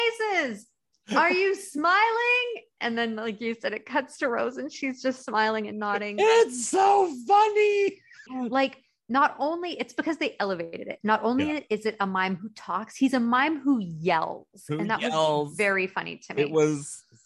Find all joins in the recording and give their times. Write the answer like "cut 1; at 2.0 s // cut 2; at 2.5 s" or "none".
cut 1; at 8.3 s